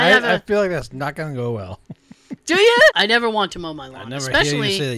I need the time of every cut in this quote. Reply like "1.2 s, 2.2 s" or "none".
2.9 s